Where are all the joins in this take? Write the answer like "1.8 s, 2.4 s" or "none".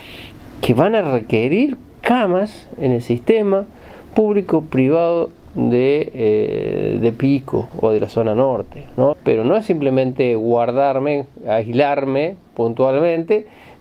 9.1 s